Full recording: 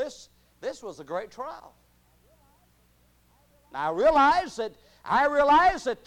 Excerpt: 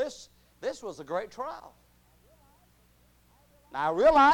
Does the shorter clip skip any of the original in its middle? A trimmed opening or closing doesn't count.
no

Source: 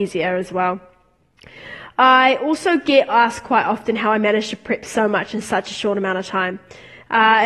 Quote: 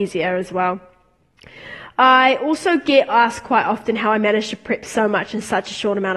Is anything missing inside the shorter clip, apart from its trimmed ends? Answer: no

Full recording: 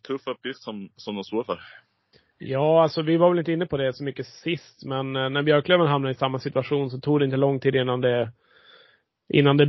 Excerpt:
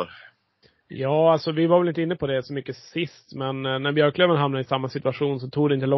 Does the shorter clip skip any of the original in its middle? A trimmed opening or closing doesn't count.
no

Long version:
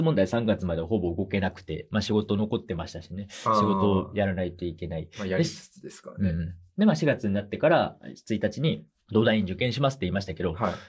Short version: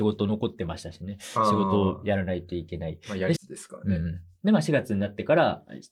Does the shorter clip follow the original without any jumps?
no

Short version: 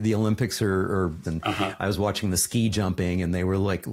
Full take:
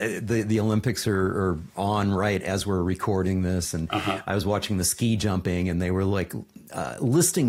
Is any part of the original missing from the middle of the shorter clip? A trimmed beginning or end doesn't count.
yes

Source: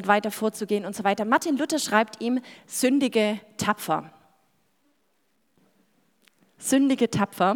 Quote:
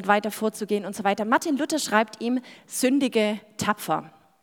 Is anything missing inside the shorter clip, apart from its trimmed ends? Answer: no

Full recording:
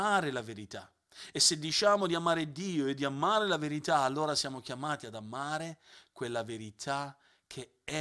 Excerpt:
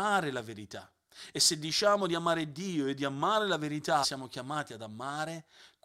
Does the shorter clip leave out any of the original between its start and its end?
yes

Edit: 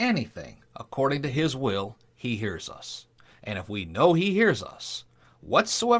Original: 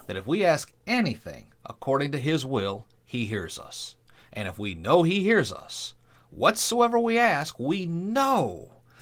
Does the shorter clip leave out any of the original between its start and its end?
no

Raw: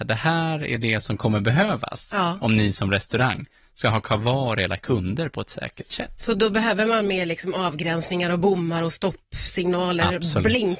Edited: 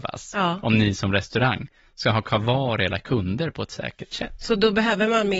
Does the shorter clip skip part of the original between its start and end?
no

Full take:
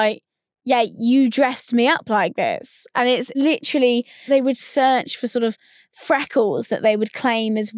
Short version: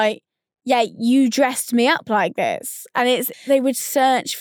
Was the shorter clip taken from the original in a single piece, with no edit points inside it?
no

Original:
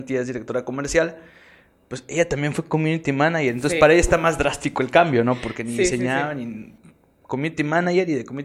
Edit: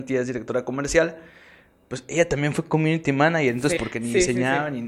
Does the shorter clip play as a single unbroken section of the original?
no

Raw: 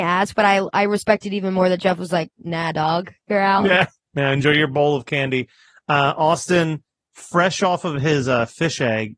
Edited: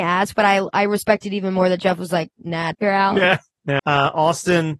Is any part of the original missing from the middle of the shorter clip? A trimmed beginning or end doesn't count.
yes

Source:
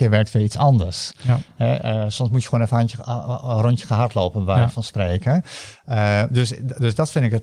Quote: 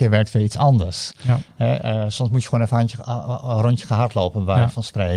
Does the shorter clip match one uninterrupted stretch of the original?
yes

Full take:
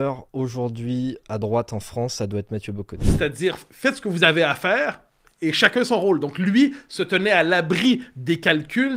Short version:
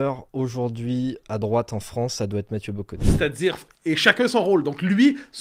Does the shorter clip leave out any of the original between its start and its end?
yes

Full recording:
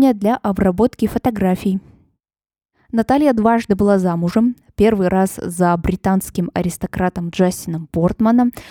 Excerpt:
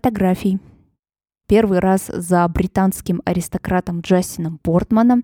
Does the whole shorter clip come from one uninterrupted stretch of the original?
no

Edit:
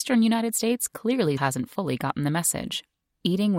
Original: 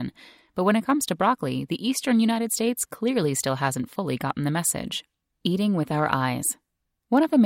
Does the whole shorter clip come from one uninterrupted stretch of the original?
no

